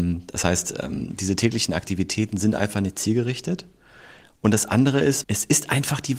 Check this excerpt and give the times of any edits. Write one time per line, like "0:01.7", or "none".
0:05.2